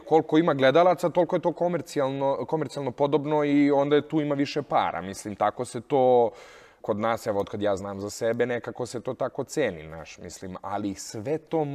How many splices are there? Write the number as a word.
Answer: one